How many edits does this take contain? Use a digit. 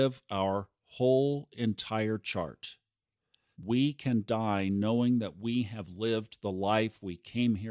1